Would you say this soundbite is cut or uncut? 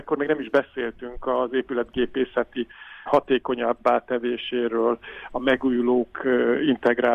cut